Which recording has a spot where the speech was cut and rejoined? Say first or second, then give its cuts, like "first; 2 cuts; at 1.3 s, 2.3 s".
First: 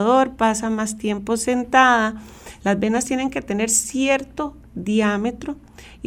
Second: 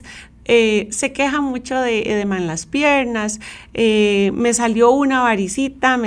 first; 1 cut; at 2.6 s